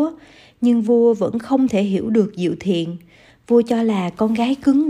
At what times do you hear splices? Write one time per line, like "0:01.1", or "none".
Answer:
none